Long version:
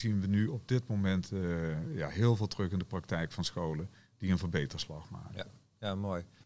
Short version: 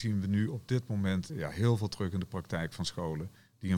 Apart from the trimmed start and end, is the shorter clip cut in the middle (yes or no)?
yes